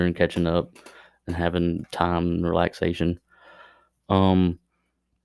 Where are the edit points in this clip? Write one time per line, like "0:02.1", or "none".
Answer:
none